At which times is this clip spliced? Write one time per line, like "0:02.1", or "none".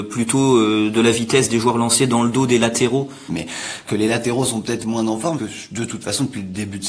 0:03.3
0:05.4